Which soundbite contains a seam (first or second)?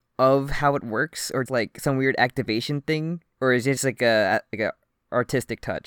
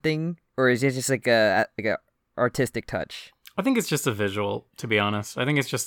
first